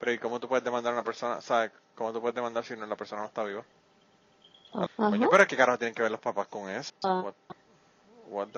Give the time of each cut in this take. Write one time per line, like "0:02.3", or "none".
0:04.9
0:06.9